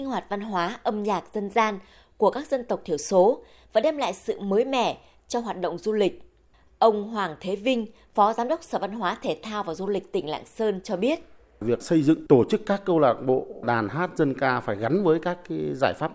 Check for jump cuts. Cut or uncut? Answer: uncut